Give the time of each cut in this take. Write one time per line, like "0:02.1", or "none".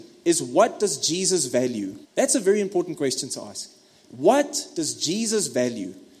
0:02.0